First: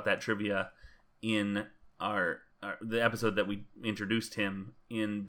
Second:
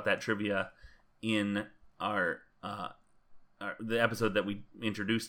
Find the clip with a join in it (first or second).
first